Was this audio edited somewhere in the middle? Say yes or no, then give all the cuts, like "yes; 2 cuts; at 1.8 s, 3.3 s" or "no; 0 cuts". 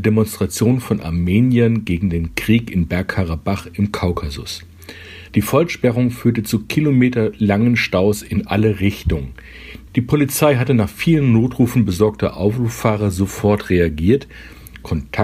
yes; 2 cuts; at 5.3 s, 9.9 s